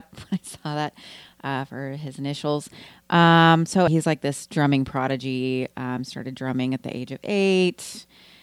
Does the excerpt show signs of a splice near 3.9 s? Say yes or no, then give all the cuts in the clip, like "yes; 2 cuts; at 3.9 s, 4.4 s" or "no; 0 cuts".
yes; 1 cut; at 3.9 s